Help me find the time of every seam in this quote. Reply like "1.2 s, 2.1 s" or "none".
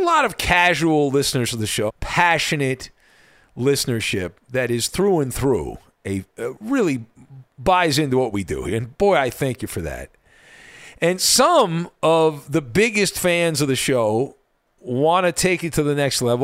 1.9 s